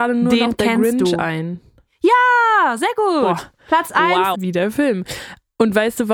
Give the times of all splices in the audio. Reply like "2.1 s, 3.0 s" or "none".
4.3 s